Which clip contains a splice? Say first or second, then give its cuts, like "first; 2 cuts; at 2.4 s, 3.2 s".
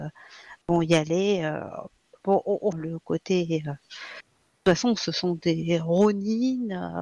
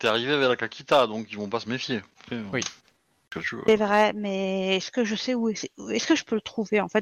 first; 1 cut; at 2.7 s